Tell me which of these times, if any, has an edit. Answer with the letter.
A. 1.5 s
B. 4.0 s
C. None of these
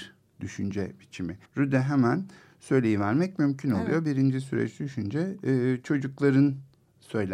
A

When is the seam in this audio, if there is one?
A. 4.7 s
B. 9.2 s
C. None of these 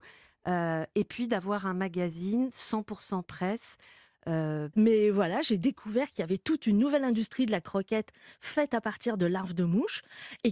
A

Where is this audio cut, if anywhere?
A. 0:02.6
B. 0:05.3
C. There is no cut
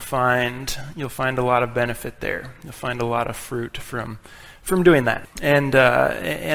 B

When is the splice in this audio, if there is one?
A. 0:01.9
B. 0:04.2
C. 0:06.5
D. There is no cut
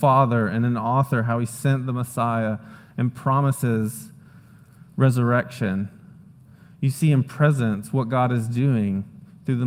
D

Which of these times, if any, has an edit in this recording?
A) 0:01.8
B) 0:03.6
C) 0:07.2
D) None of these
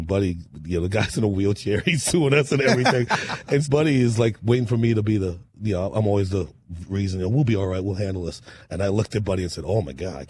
B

